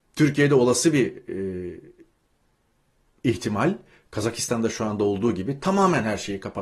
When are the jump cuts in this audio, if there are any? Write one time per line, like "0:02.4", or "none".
none